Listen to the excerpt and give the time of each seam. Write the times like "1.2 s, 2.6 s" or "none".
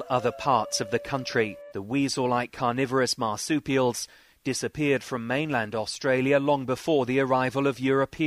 1.7 s